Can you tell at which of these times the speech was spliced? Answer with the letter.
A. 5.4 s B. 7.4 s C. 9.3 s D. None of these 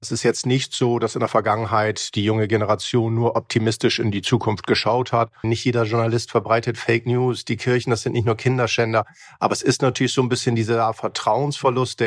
A